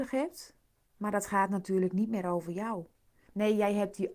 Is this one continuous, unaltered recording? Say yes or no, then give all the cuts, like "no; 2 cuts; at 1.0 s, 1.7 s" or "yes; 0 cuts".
no; 1 cut; at 3.3 s